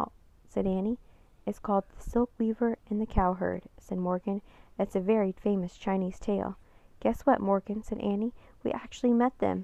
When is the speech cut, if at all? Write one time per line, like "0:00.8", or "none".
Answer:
none